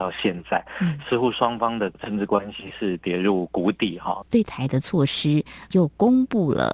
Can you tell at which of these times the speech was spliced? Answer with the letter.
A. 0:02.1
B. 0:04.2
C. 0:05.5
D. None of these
B